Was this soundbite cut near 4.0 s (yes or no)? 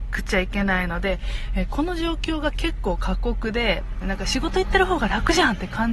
yes